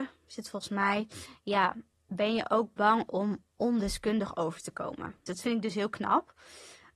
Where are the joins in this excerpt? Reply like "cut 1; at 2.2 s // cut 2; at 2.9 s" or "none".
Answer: cut 1; at 5.3 s